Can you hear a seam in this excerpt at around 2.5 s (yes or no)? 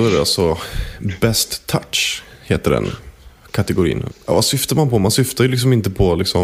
no